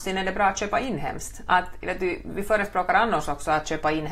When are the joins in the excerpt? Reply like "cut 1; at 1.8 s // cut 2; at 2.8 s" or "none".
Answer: none